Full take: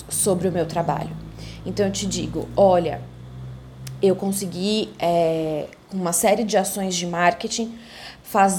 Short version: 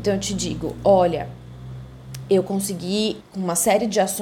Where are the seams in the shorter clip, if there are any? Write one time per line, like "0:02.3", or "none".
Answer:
0:03.2